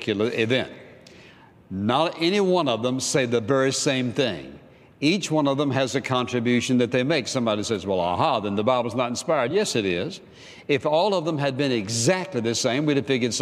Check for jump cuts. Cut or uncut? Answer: uncut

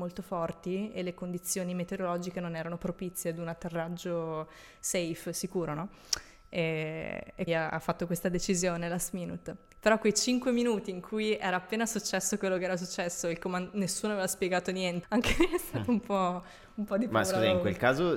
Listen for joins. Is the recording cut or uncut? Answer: cut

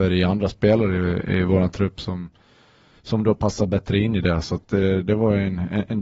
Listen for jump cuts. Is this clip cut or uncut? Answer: uncut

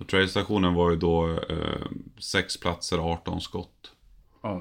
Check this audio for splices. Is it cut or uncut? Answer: uncut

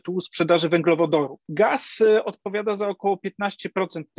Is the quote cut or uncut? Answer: uncut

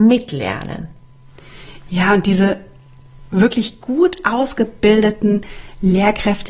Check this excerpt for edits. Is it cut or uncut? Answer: uncut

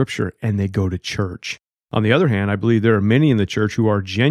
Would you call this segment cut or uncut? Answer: cut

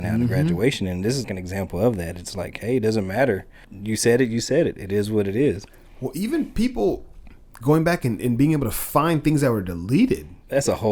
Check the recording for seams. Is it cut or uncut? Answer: cut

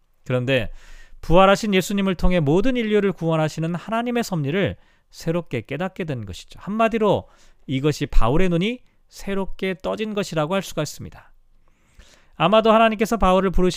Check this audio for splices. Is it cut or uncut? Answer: uncut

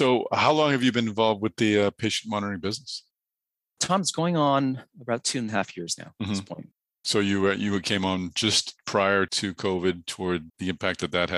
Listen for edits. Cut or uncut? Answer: uncut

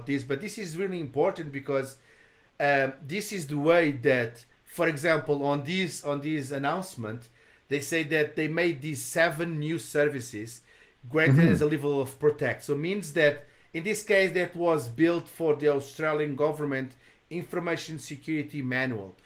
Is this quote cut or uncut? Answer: uncut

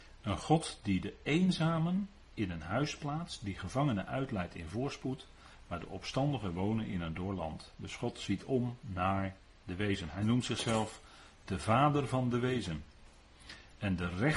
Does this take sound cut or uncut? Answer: uncut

